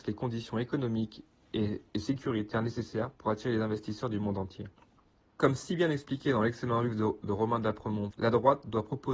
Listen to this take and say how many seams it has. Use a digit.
2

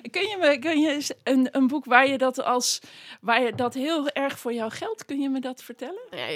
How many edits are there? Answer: 0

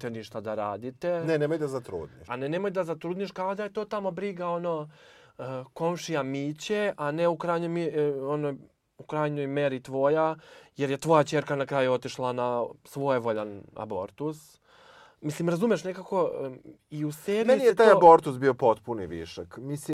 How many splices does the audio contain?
1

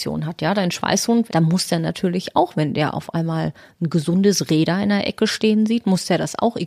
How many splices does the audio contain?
1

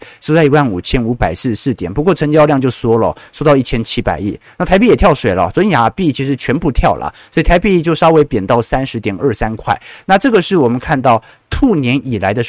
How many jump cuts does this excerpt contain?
0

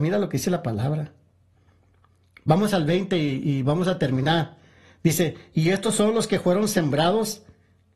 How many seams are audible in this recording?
0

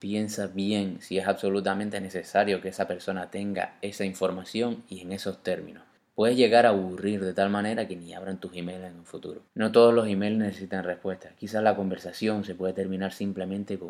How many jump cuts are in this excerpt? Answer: 1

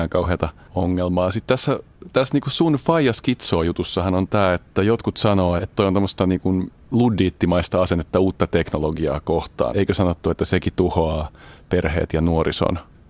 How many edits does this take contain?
2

